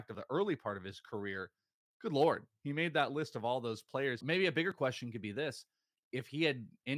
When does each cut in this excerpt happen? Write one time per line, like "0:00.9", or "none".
0:04.2

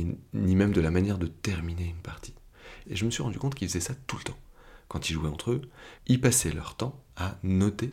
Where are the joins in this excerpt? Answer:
0:02.8
0:06.0

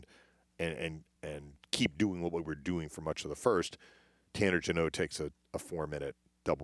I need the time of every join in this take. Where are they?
none

